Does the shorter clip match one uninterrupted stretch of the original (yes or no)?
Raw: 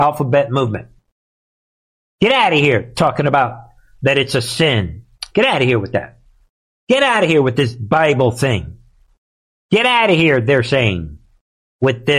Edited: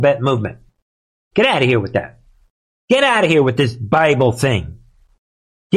no